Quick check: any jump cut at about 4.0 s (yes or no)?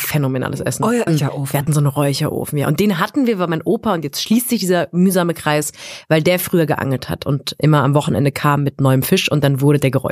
no